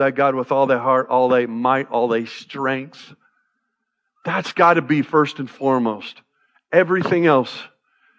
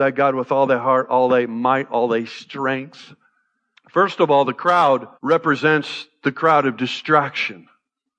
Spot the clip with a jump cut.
second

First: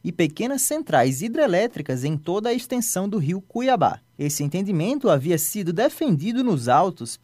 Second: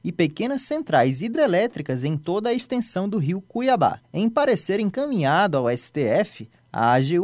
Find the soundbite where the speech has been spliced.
second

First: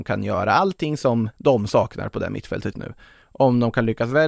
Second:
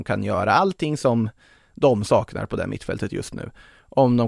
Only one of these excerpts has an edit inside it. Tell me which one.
first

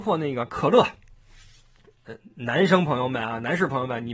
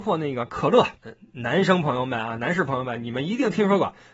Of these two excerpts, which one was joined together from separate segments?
second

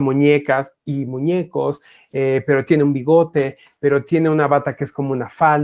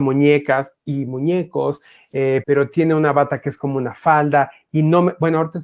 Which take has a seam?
second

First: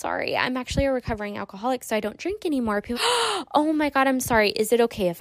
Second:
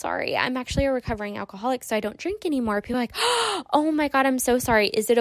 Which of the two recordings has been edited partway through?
first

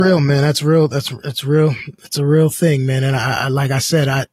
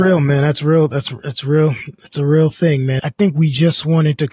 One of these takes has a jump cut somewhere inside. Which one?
second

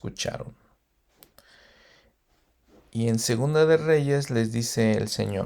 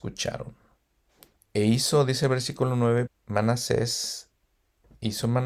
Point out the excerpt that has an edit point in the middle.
second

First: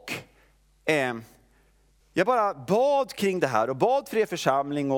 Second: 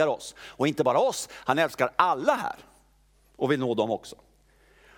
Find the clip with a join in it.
first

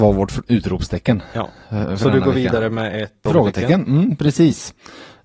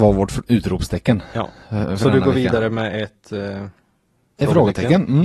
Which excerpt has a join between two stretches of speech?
first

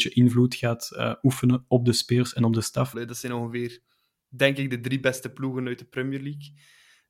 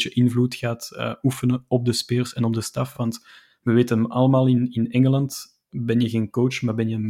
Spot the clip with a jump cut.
first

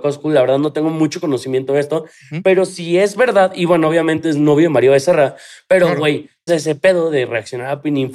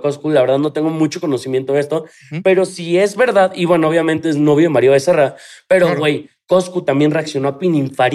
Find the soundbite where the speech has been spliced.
first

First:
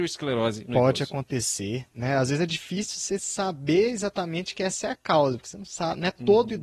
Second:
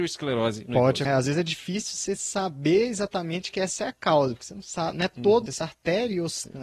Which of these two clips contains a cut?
second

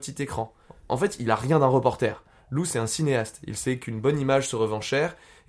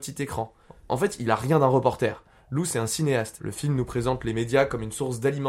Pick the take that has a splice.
second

